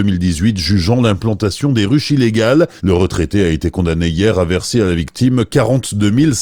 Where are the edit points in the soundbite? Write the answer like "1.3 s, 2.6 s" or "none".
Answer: 2.8 s